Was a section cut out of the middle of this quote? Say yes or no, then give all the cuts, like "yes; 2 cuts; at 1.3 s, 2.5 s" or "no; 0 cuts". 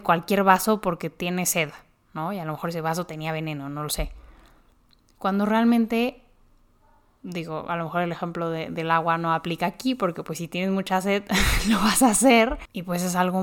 no; 0 cuts